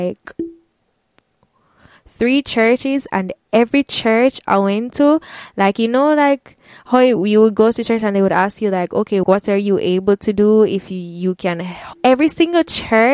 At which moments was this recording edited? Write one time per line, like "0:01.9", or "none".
0:09.2
0:11.9